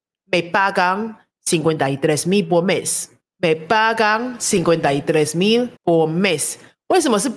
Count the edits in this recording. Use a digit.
2